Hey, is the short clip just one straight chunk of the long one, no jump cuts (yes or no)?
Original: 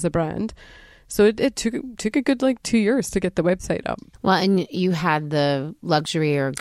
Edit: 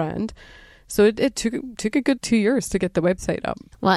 no